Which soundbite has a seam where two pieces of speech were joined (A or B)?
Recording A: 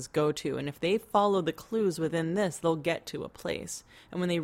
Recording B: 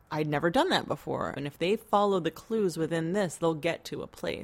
B